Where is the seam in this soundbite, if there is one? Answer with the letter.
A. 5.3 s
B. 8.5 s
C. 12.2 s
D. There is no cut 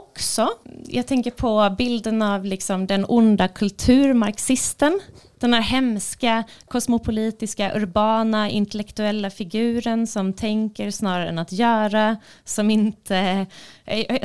D